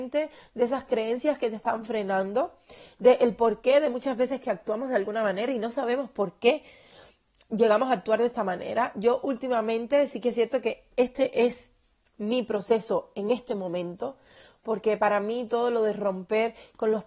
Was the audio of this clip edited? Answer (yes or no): no